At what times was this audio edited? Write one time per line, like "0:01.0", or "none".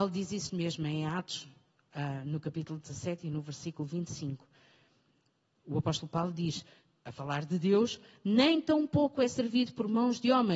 none